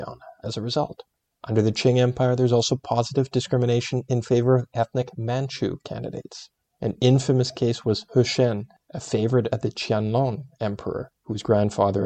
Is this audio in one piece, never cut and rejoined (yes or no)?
no